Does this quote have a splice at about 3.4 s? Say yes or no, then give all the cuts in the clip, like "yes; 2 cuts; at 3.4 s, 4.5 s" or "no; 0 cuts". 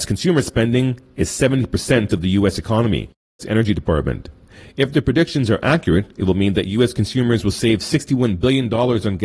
yes; 1 cut; at 3.4 s